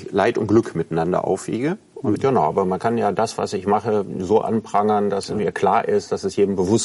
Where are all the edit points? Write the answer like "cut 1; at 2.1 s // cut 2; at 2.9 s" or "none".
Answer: cut 1; at 2.1 s